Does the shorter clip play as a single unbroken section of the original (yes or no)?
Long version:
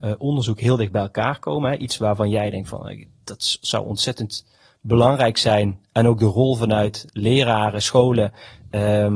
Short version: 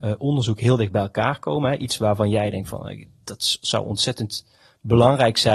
yes